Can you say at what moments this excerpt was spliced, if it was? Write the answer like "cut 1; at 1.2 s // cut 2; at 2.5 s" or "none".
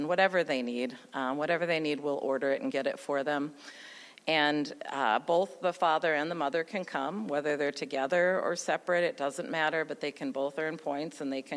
none